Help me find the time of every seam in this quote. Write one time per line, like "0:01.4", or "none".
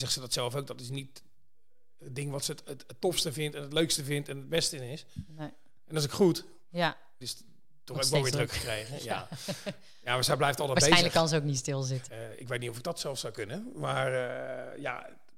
0:07.2
0:12.1

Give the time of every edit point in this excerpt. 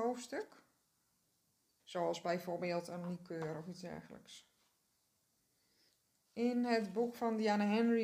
0:01.8

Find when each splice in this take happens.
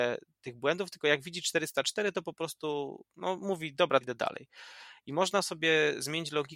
0:04.0

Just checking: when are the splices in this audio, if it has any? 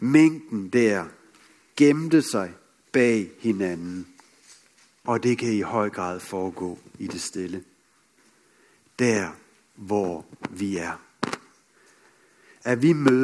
0:05.1

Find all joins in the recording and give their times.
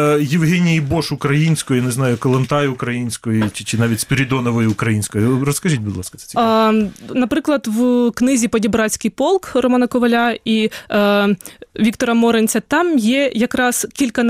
0:07.1

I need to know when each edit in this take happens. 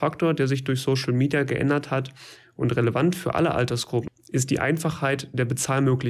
0:04.1

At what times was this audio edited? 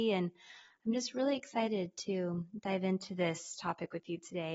none

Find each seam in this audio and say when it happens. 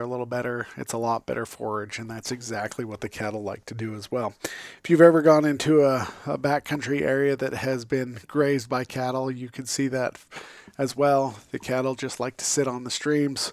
none

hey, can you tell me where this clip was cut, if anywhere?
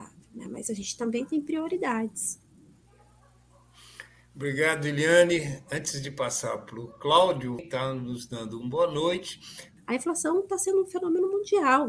0:07.6
0:09.8

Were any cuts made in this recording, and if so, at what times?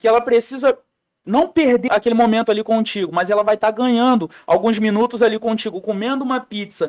0:01.9

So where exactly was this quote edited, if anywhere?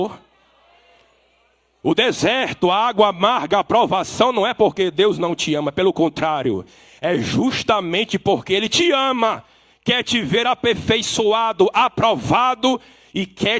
none

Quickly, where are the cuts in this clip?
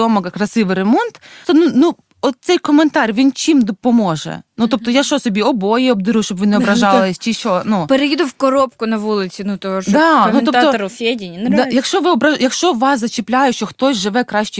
0:01.4

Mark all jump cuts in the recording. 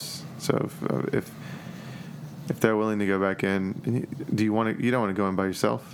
none

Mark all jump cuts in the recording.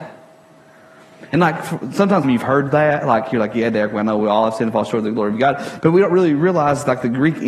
0:02.2

